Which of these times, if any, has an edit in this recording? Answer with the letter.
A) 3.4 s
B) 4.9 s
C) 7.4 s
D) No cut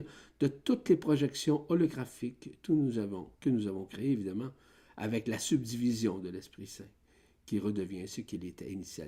D